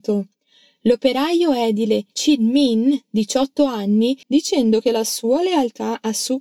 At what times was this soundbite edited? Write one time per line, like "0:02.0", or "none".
0:04.2